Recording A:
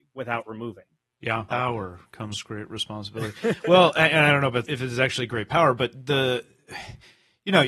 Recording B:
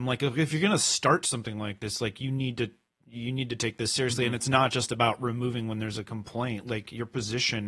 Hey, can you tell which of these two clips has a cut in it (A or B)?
A